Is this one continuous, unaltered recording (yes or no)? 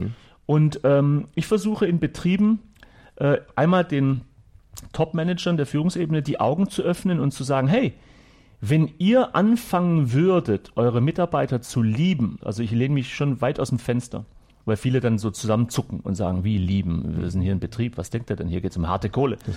no